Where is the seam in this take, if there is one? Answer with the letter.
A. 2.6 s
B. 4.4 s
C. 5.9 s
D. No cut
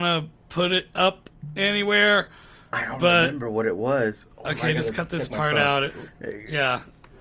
D